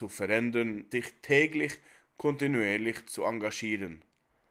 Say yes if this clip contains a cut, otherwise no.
yes